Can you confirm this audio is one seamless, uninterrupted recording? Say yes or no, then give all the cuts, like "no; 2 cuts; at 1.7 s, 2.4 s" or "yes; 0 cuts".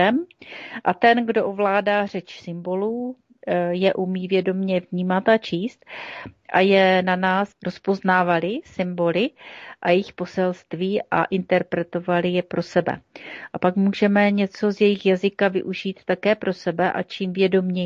no; 1 cut; at 7.5 s